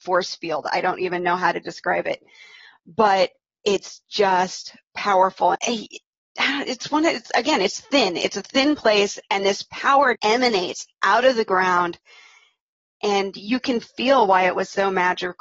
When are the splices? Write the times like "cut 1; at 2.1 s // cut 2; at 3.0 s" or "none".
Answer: cut 1; at 5.5 s // cut 2; at 10.1 s